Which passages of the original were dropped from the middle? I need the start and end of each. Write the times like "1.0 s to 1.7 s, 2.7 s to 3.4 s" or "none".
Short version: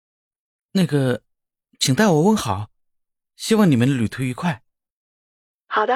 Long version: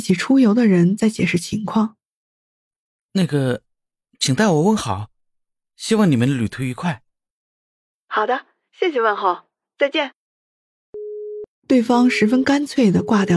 none